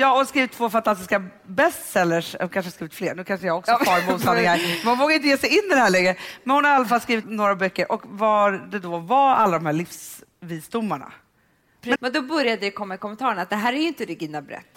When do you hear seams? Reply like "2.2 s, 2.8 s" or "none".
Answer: 7.2 s, 11.9 s